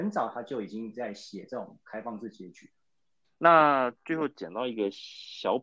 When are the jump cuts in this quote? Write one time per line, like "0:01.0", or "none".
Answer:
0:03.2